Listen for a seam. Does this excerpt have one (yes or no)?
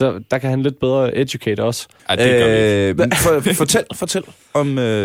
yes